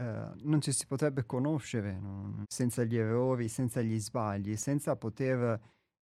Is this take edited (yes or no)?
yes